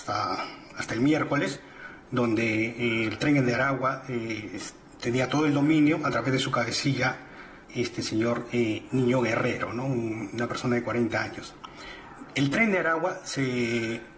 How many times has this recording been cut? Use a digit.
1